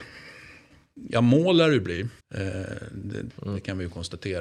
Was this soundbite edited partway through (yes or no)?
yes